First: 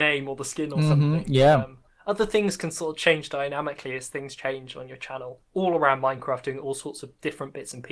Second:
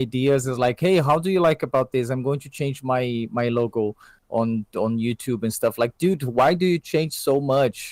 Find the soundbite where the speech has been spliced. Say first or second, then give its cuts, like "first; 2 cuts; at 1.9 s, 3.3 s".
first; 1 cut; at 5.4 s